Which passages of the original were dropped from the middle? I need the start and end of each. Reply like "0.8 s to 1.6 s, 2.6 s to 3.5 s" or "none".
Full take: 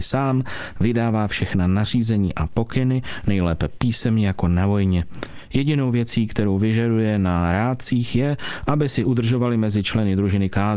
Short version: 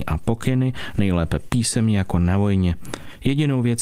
none